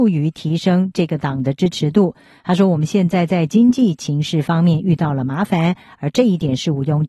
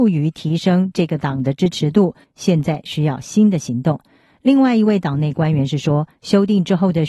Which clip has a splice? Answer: second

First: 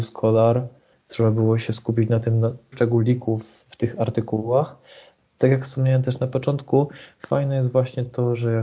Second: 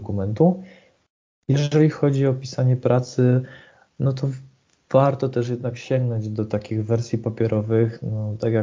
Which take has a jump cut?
first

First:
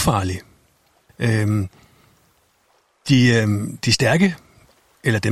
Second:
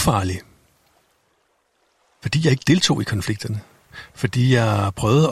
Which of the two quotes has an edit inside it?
first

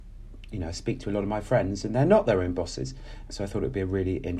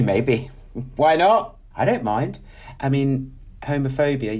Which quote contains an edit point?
second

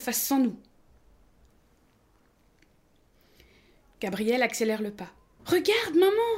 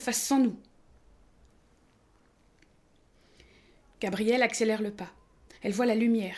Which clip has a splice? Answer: first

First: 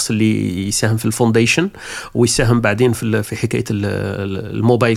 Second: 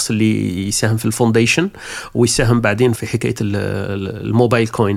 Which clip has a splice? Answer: second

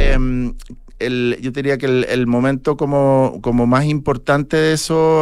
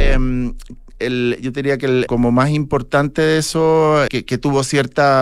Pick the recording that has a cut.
second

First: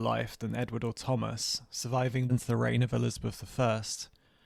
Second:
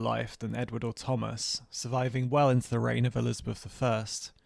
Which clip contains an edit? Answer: first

